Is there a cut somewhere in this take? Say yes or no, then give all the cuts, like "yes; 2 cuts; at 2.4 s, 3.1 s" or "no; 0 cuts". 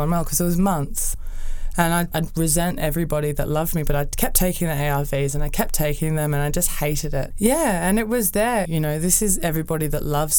yes; 2 cuts; at 7.3 s, 8.7 s